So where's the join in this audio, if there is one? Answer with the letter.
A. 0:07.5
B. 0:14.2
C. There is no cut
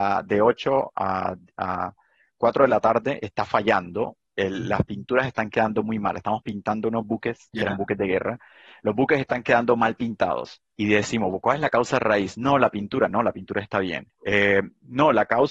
A